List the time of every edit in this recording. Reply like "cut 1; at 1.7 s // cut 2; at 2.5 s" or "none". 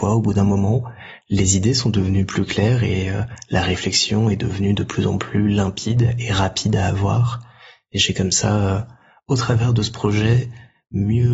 none